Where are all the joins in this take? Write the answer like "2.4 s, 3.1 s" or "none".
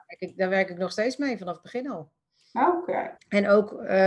3.2 s